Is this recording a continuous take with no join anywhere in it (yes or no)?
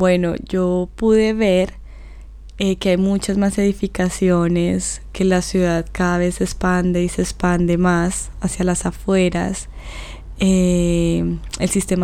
yes